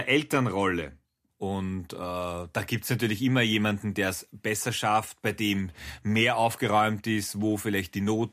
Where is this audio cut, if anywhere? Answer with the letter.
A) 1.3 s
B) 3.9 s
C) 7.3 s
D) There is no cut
A